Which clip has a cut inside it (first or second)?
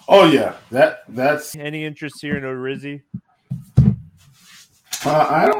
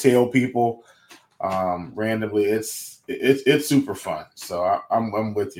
first